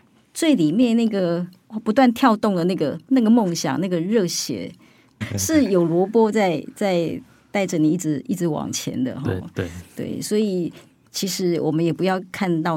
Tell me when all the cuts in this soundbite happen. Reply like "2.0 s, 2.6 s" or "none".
5.2 s